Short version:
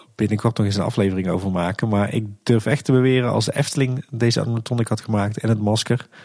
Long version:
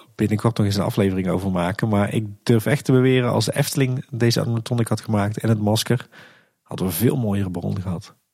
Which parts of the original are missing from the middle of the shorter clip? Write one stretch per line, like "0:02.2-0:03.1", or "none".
none